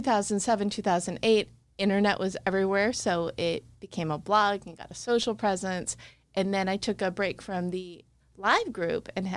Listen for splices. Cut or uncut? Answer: uncut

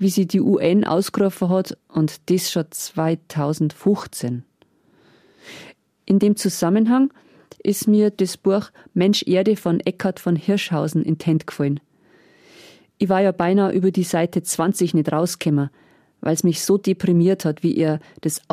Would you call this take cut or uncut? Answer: uncut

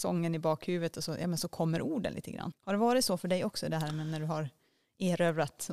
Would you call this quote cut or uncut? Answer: cut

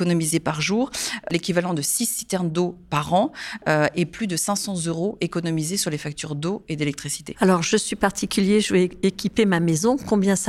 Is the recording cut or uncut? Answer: uncut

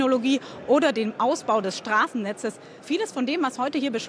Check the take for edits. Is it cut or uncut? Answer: uncut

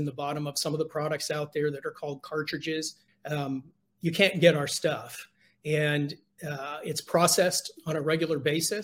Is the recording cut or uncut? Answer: cut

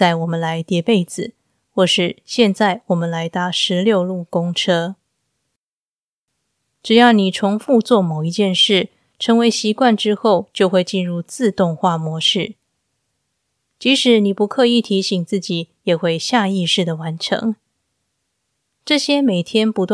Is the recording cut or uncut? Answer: uncut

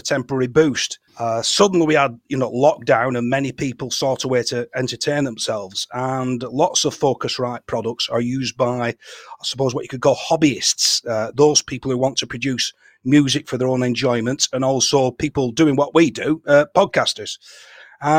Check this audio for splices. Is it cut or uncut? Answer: cut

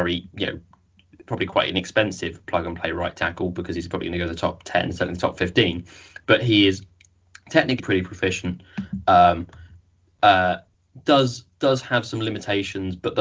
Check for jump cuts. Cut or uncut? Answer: cut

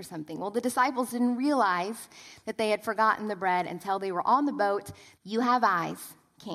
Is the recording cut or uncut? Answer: cut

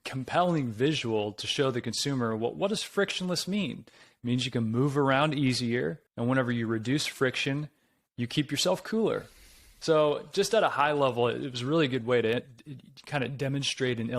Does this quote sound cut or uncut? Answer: cut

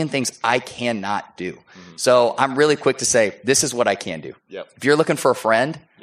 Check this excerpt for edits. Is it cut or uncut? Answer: uncut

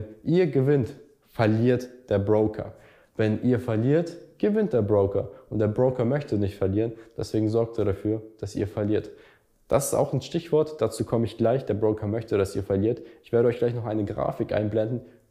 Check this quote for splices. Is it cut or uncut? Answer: uncut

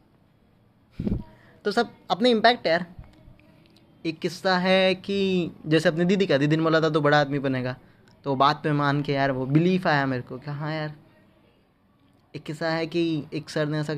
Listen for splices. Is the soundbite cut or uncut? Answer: uncut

